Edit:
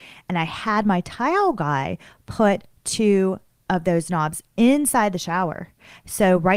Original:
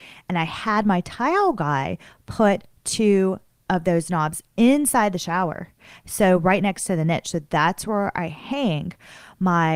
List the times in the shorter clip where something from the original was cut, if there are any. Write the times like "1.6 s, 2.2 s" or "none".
none